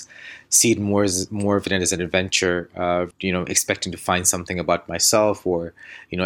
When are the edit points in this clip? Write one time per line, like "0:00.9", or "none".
0:03.1